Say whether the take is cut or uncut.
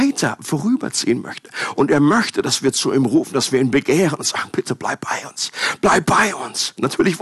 uncut